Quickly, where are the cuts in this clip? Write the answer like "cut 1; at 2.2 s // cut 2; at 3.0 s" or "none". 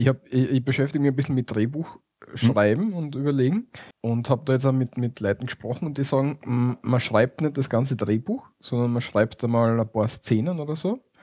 cut 1; at 3.9 s